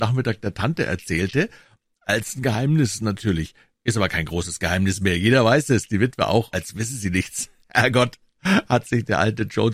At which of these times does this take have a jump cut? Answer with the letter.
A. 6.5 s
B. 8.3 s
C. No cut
A